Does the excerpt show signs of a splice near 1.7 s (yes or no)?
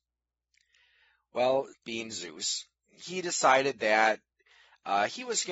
yes